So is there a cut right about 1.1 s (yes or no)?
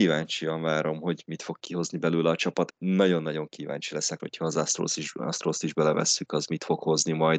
no